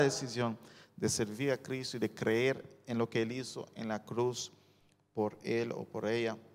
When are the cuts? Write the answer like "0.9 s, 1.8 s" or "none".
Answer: none